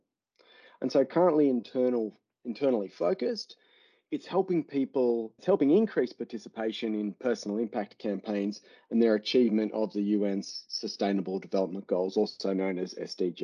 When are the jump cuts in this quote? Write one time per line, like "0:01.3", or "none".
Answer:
0:05.4

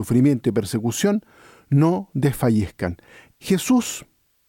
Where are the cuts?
0:03.3

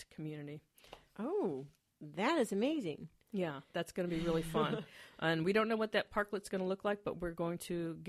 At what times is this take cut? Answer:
none

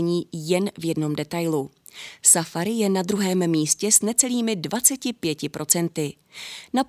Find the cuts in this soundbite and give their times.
none

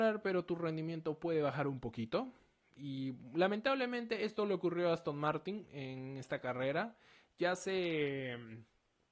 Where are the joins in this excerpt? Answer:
none

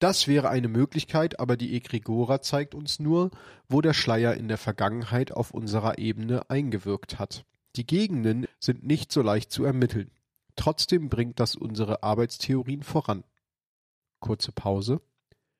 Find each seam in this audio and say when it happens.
0:08.5

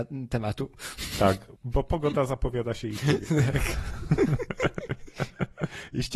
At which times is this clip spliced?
0:01.6

